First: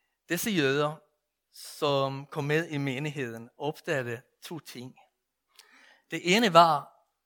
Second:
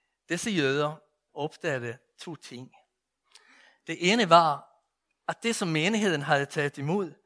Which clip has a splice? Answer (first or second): second